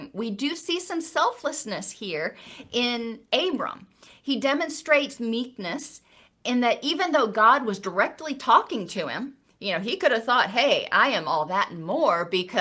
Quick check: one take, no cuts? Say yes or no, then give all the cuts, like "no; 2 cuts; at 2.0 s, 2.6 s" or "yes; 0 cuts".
yes; 0 cuts